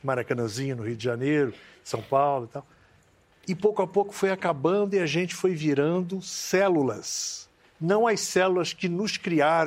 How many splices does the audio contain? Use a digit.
1